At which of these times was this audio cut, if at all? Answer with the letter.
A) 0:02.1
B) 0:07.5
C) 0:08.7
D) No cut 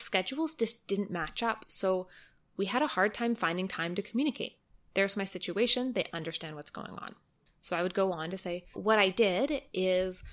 C